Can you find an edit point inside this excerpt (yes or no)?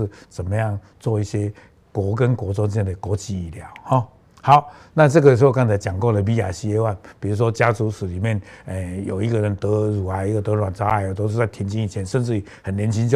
no